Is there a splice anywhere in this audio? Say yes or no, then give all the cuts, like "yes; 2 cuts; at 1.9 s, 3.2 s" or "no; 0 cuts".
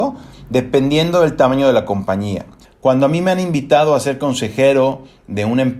yes; 1 cut; at 2.6 s